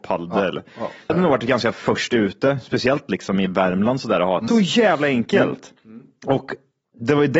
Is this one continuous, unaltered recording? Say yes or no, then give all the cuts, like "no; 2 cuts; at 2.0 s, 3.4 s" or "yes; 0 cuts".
no; 2 cuts; at 1.1 s, 4.5 s